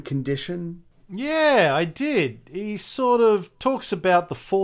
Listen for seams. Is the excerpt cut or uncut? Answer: uncut